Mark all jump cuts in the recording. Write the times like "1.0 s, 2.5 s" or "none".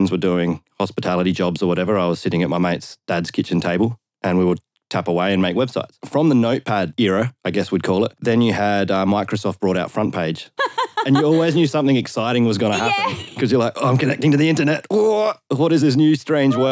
10.6 s